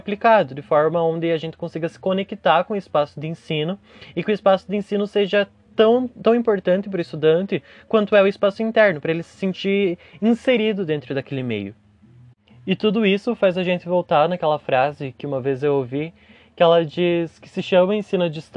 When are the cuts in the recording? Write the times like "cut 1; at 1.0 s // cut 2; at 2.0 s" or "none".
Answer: none